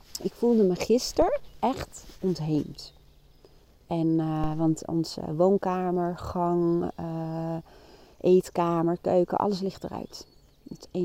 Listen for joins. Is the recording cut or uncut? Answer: uncut